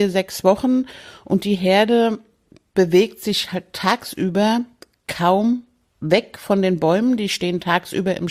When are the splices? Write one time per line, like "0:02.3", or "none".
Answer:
none